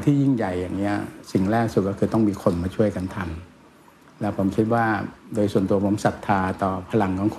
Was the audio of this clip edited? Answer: no; 0 cuts

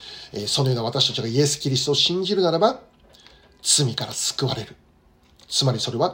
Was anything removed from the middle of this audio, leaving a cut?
no; 0 cuts

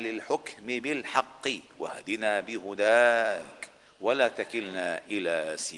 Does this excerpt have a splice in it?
yes; 1 cut; at 1.7 s

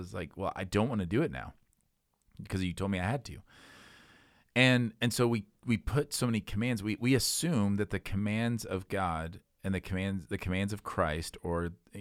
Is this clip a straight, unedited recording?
yes; 0 cuts

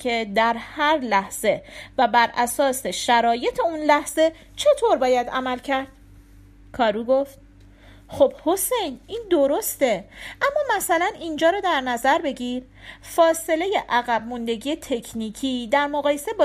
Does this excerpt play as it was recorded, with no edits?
yes; 0 cuts

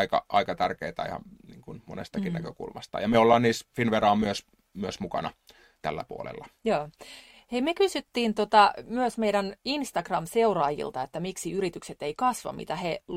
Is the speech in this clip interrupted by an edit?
no; 0 cuts

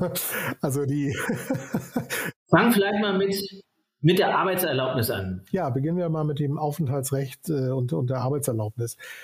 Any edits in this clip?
no; 0 cuts

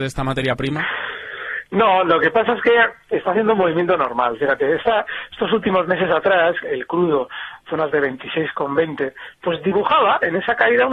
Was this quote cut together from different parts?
yes; 1 cut; at 6.6 s

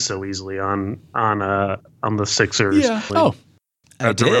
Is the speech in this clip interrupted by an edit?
yes; 1 cut; at 3.1 s

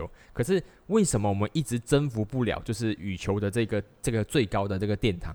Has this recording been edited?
no; 0 cuts

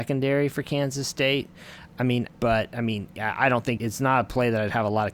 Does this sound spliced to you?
yes; 2 cuts; at 2.3 s, 3.8 s

